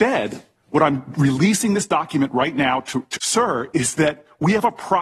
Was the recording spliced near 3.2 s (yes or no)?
yes